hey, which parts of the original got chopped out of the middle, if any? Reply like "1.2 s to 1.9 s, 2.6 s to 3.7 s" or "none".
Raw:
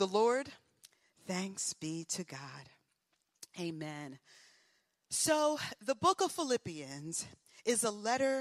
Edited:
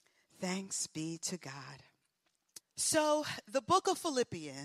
3.5 s to 4.9 s